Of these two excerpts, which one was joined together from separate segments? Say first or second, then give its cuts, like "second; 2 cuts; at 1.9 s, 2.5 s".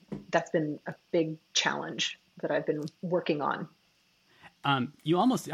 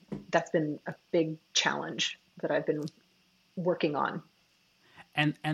first; 2 cuts; at 2.9 s, 4.6 s